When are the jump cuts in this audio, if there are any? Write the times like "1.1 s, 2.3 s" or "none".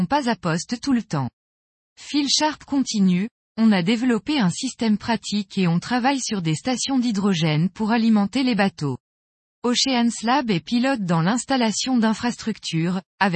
none